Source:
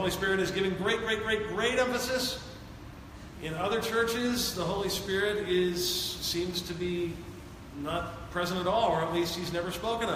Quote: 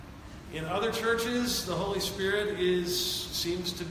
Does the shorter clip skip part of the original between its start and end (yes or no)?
no